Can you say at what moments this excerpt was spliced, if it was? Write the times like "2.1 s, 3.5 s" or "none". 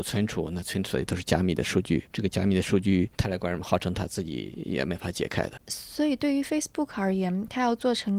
none